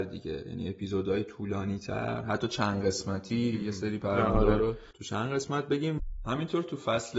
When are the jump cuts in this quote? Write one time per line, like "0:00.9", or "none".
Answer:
none